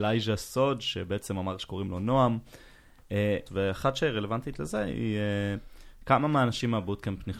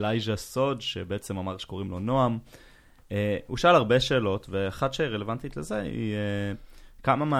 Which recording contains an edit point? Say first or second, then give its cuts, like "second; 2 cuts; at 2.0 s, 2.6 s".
first; 1 cut; at 3.5 s